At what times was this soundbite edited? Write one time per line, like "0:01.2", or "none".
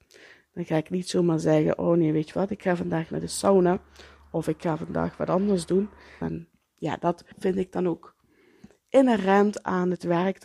0:06.2
0:07.3